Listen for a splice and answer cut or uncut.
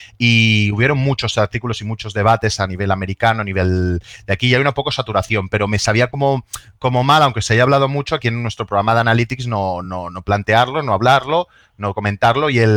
uncut